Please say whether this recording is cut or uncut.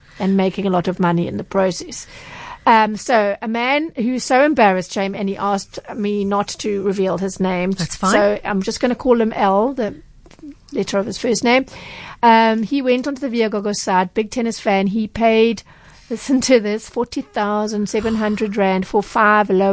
uncut